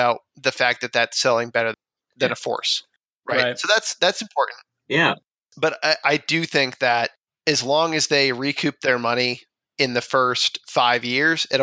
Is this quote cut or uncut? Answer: uncut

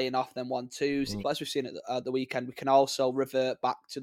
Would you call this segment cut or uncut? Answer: cut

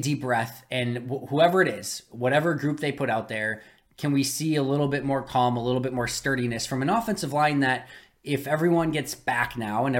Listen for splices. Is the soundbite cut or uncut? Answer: uncut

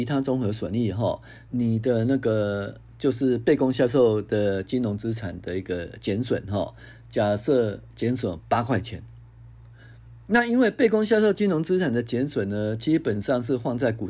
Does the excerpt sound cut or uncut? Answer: cut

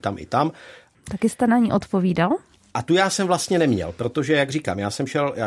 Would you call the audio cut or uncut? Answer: cut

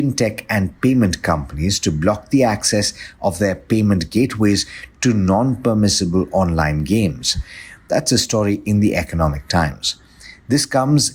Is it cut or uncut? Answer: uncut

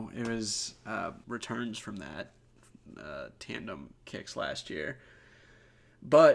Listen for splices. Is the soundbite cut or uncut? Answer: cut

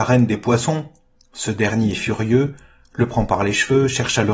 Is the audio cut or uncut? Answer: cut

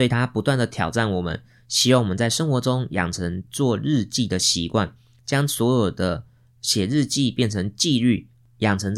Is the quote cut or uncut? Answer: uncut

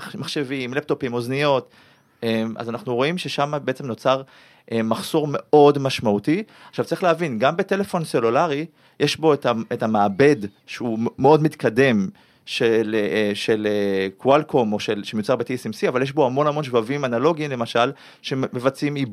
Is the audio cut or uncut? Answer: uncut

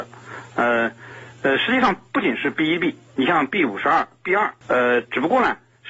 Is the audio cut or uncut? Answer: cut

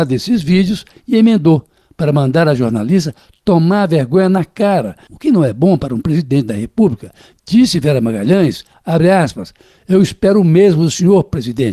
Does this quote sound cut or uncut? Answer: cut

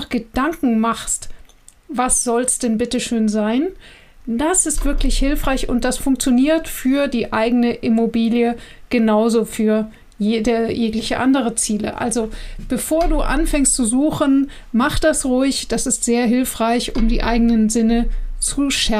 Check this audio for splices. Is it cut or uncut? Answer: uncut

